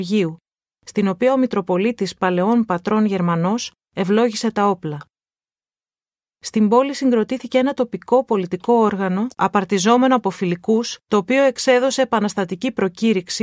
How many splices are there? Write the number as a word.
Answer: two